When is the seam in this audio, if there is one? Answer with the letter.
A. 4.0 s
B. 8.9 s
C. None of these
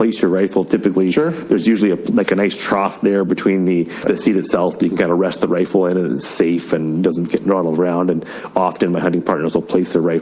A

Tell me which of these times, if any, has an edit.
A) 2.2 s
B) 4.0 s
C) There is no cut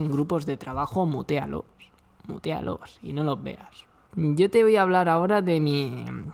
B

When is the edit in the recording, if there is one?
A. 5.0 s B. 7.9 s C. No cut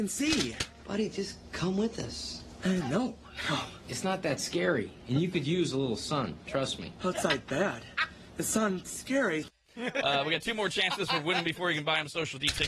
C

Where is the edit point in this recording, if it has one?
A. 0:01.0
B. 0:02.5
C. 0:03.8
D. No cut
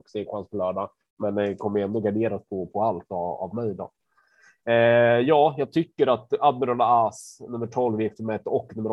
D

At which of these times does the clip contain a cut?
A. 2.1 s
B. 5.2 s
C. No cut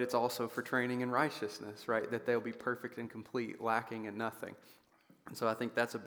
C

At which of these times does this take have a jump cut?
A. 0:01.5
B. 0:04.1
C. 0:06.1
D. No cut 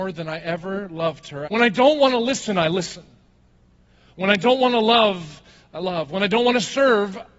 A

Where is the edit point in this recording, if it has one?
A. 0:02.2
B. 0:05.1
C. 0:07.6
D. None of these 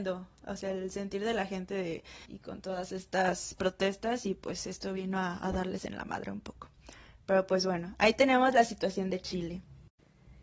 A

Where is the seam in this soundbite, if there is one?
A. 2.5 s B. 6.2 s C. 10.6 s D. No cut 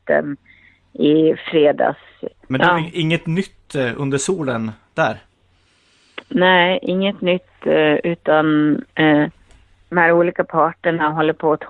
A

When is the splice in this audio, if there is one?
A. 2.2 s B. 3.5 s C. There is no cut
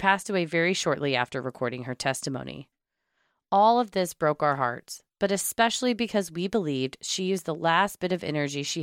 C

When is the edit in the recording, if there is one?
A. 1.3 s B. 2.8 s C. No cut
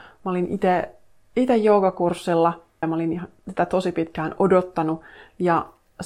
B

